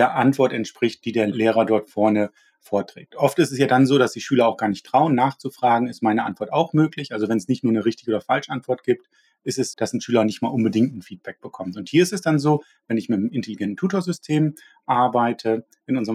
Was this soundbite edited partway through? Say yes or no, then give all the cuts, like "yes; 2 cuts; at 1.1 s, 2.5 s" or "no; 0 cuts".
yes; 1 cut; at 9.7 s